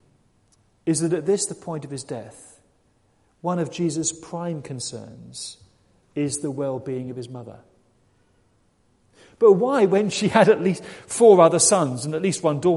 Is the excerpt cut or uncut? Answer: uncut